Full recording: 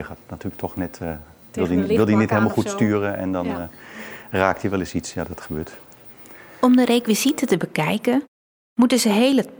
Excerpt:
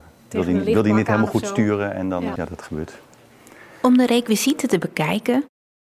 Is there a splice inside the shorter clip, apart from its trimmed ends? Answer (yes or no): yes